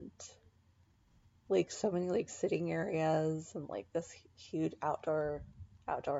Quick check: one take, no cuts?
no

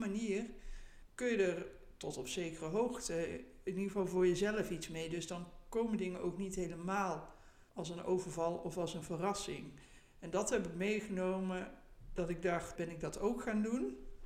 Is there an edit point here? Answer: yes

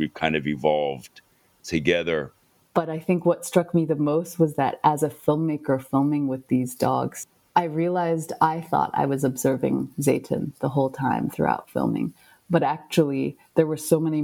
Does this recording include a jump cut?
yes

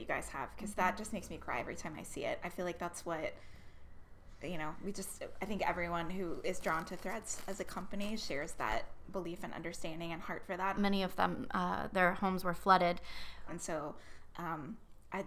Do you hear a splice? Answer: yes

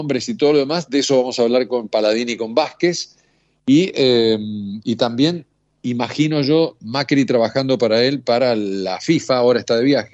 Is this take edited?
no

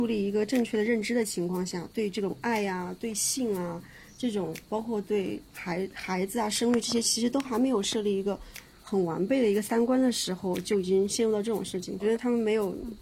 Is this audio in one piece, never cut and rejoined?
no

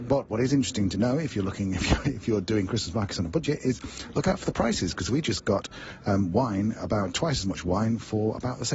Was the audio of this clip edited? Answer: no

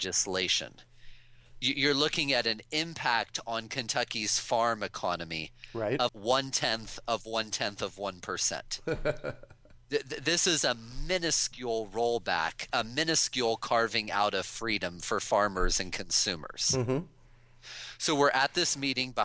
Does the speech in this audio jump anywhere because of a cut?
yes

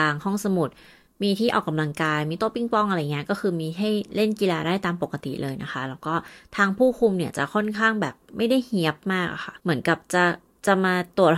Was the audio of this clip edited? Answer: yes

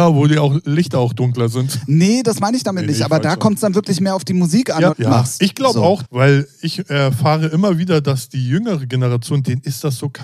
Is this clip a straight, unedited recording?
no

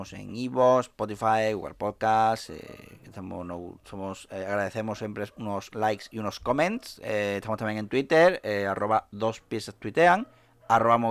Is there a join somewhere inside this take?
no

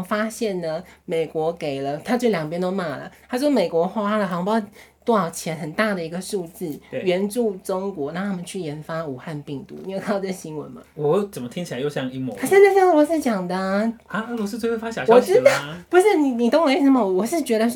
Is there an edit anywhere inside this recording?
no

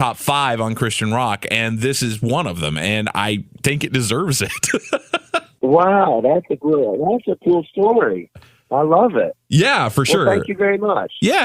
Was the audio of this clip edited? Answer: no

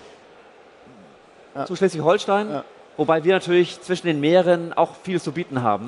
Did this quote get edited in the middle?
yes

